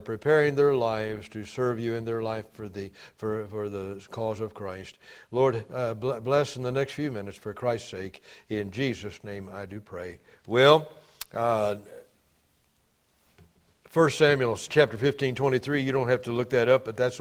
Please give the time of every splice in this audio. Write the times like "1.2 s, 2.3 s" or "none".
10.3 s